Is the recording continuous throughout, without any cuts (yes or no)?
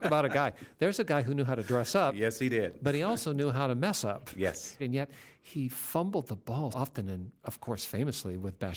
no